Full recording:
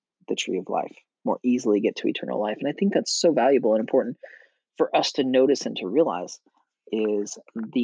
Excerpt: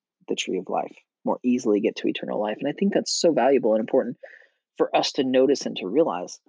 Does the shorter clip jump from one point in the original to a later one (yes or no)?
no